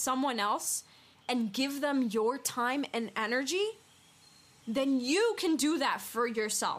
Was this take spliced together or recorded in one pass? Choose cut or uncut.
uncut